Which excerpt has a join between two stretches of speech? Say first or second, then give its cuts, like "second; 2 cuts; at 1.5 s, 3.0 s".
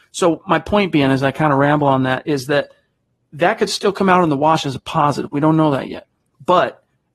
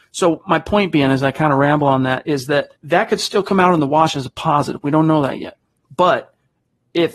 second; 1 cut; at 2.8 s